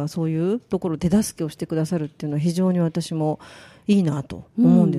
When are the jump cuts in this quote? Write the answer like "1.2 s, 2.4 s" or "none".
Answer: none